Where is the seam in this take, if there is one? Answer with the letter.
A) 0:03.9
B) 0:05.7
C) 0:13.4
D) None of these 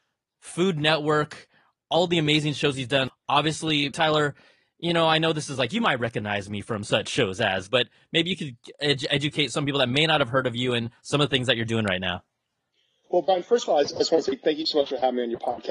A